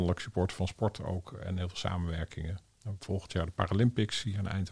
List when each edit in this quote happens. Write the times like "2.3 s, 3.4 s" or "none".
none